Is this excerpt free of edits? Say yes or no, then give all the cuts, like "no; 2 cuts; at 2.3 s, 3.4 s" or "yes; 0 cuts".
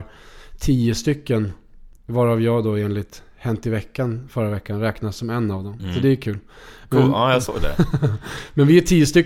yes; 0 cuts